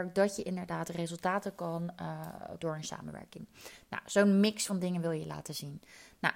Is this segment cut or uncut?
cut